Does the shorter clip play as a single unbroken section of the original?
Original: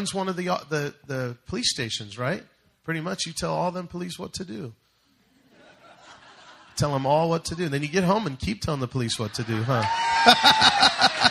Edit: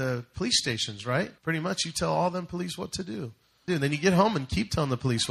no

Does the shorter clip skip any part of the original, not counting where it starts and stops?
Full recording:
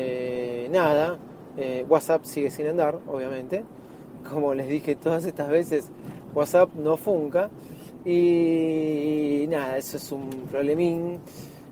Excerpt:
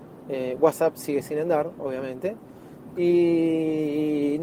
yes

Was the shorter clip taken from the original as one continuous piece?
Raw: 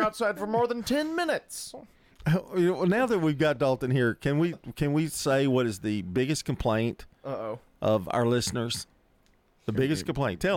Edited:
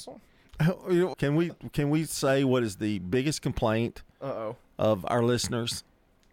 no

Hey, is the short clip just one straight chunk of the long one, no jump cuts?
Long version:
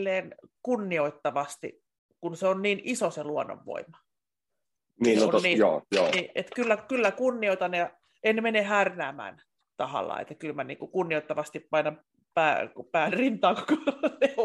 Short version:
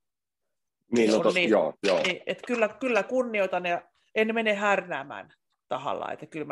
yes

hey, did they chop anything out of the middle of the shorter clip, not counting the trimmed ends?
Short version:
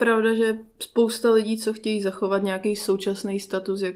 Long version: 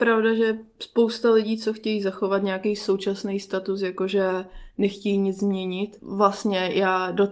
no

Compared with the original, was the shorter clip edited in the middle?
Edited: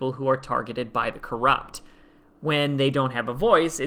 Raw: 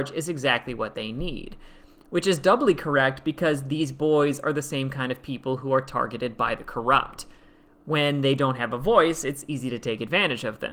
no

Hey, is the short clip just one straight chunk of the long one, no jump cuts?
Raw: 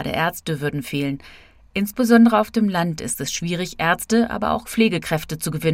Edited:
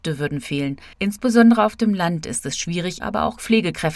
no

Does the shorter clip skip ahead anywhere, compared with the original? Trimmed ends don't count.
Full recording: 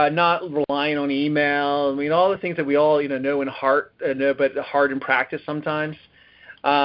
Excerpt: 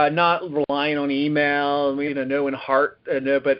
yes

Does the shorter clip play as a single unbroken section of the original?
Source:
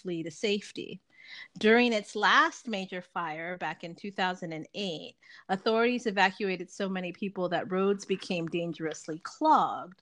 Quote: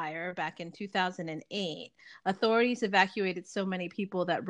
yes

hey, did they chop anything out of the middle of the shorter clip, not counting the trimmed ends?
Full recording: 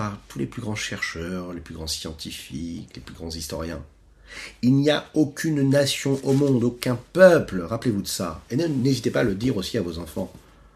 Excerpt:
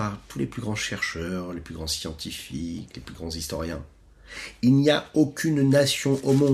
no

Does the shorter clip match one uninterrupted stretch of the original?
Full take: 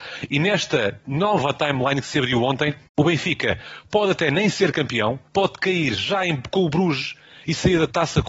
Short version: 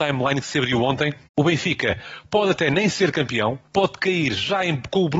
yes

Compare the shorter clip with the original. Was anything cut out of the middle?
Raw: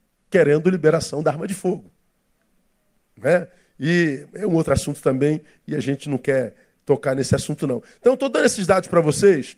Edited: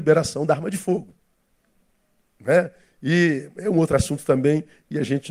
no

